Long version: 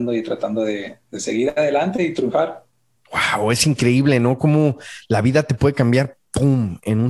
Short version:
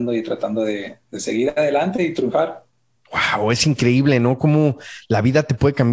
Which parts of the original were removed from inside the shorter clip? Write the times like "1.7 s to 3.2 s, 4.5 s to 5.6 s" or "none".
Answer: none